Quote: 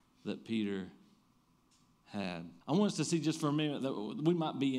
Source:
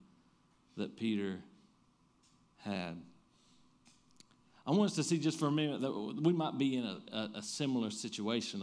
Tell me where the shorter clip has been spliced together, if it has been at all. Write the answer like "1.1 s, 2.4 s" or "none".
2.6 s